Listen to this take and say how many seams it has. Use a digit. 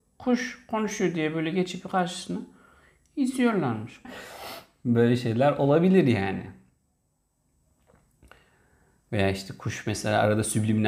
1